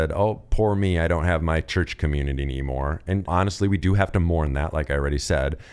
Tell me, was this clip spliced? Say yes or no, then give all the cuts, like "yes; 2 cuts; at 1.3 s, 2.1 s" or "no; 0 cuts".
yes; 1 cut; at 3.3 s